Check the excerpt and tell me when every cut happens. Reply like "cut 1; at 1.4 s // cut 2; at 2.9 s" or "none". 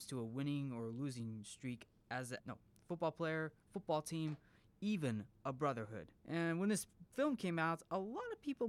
cut 1; at 2.4 s // cut 2; at 6.2 s